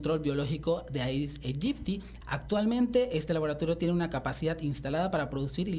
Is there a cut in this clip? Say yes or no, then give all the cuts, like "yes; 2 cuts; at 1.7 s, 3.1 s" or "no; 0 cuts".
yes; 1 cut; at 2.2 s